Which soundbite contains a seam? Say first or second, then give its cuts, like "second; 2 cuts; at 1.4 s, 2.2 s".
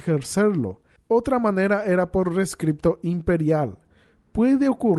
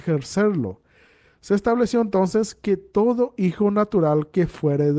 first; 1 cut; at 1.0 s